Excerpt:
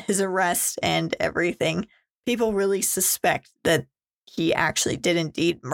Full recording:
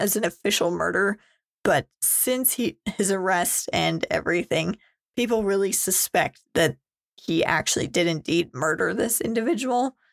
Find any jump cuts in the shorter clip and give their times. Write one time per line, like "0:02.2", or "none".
none